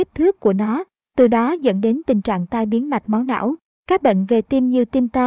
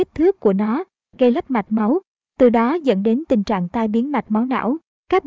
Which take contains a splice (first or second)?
first